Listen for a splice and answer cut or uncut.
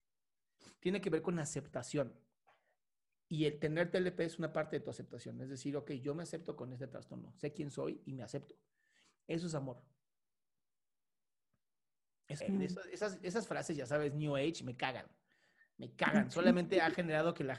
cut